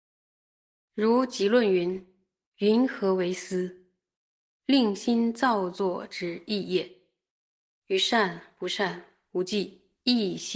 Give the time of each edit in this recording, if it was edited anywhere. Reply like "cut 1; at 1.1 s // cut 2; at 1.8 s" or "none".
none

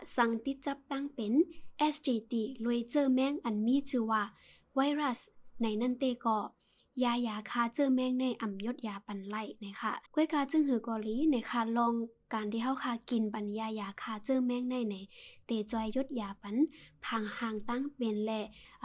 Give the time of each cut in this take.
cut 1; at 10.1 s

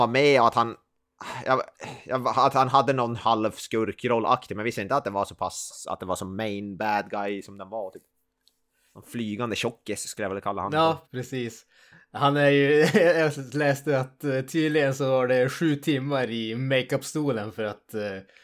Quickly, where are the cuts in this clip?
cut 1; at 11.0 s

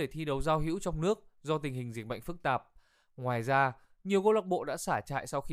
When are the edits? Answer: none

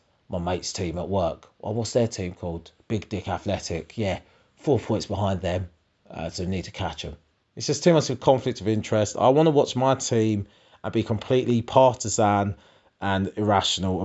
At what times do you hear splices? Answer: cut 1; at 7.4 s

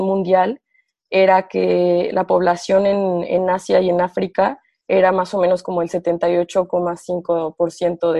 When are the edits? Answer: none

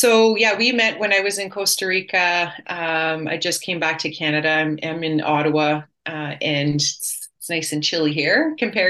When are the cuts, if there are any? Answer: none

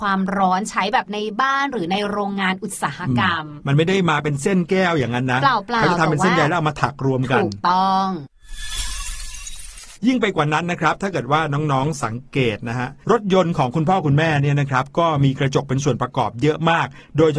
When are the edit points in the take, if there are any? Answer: cut 1; at 10.0 s

